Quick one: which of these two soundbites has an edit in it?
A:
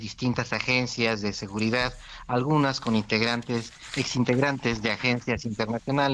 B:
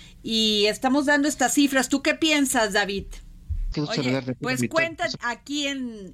B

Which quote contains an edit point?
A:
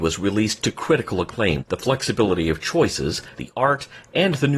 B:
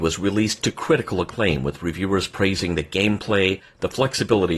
A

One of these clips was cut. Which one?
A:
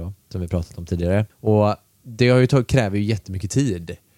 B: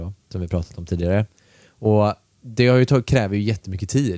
A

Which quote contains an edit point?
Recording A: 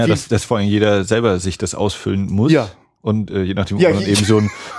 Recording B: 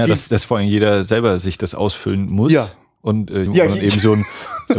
B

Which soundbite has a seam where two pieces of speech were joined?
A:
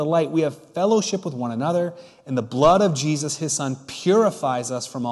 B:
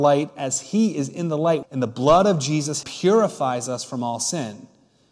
B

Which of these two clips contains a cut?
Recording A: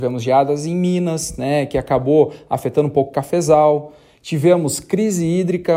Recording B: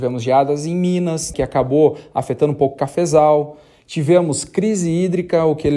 B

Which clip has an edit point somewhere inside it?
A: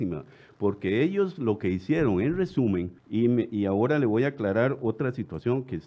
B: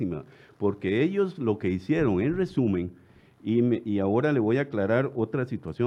A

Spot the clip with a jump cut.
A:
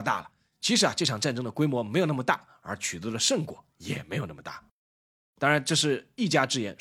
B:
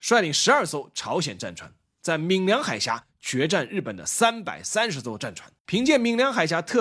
B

